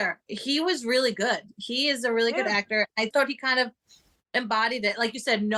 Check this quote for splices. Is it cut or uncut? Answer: cut